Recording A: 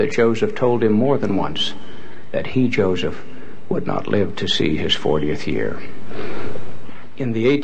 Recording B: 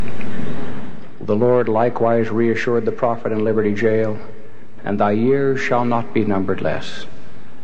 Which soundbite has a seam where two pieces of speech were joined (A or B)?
B